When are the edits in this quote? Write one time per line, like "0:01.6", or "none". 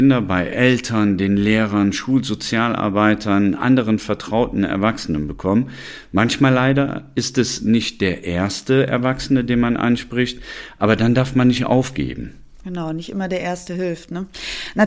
none